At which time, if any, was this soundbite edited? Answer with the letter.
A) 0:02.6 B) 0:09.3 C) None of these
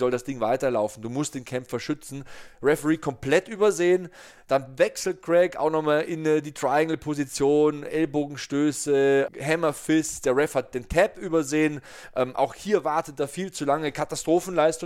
B